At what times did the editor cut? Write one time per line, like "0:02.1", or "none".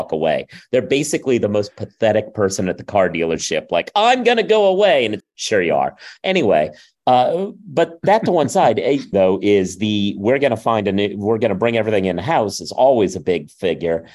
0:05.2
0:09.1